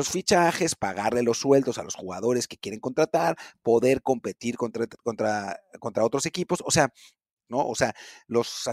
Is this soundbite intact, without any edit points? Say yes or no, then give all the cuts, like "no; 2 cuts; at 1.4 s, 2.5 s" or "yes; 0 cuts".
no; 1 cut; at 7.5 s